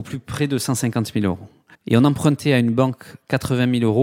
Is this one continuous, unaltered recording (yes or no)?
no